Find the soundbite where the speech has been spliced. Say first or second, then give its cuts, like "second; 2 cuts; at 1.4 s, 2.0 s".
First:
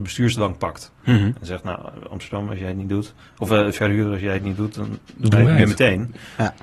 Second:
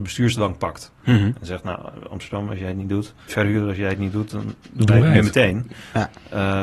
second; 1 cut; at 3.3 s